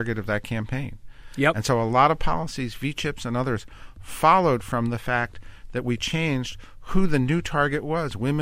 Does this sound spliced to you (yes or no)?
no